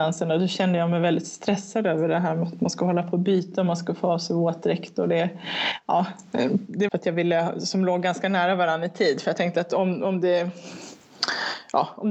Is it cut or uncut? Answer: cut